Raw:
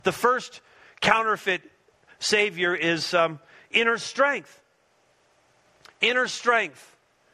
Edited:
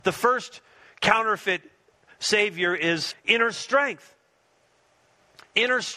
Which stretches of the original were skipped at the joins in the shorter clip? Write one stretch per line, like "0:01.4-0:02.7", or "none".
0:03.1-0:03.6